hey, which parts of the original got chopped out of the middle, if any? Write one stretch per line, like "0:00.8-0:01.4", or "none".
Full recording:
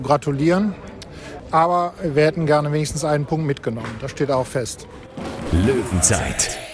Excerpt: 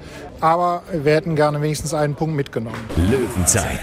0:04.0-0:05.4